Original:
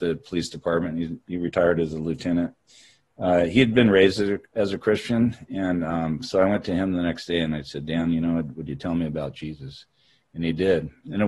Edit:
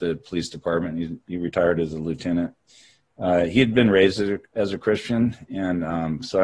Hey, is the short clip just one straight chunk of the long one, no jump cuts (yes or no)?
yes